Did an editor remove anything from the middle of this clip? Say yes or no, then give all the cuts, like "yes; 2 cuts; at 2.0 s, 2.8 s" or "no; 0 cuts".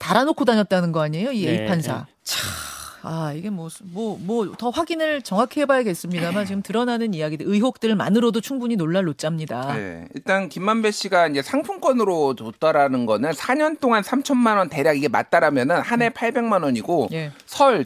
yes; 1 cut; at 2.2 s